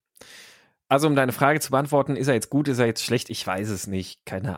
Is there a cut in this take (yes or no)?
no